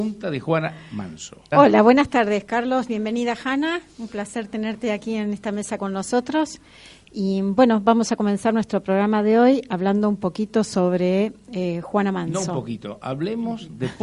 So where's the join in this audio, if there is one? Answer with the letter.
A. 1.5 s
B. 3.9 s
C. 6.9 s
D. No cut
A